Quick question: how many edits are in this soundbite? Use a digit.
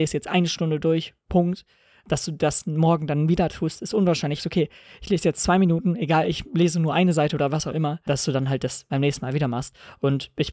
2